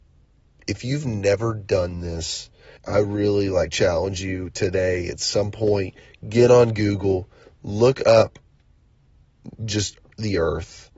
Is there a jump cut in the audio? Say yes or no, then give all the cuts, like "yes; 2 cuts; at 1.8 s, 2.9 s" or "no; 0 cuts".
yes; 1 cut; at 2.8 s